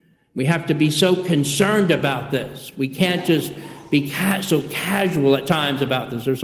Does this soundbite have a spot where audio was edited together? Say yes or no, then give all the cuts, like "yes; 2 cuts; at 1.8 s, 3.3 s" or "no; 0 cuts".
no; 0 cuts